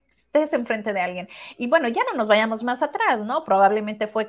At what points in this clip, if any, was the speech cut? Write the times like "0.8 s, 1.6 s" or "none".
none

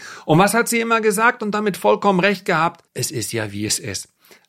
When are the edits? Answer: 2.9 s

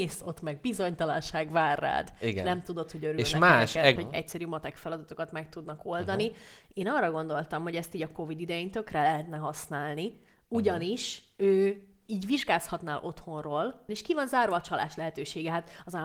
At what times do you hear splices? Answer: 4.0 s, 13.9 s

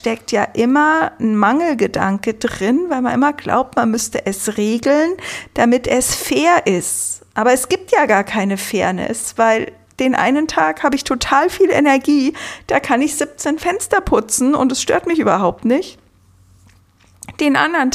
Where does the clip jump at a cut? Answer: none

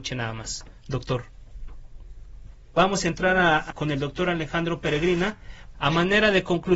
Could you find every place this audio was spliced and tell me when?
2.7 s, 3.7 s, 5.7 s

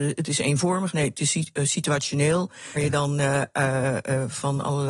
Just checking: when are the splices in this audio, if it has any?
2.8 s

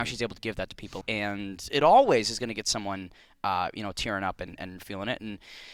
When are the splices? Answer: 1.0 s

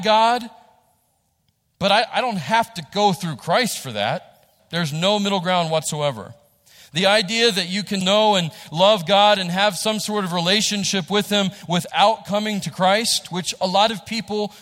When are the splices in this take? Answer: 4.6 s, 8.0 s

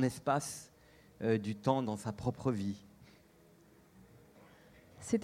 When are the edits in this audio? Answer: none

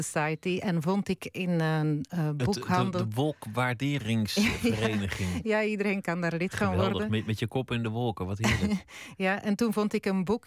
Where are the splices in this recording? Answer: none

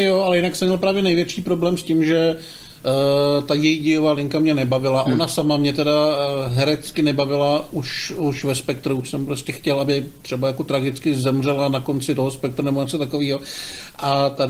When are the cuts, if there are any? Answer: none

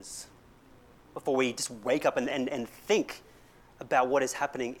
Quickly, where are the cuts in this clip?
2.3 s

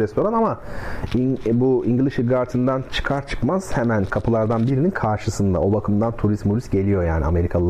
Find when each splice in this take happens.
none

